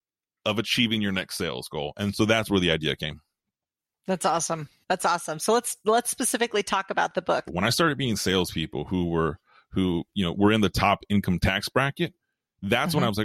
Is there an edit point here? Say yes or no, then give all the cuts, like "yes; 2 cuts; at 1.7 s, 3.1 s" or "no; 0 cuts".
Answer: yes; 1 cut; at 7.5 s